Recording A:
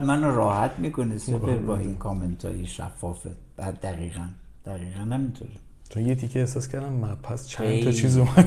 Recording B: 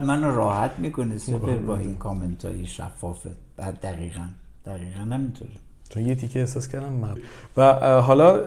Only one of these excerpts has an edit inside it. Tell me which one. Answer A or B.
B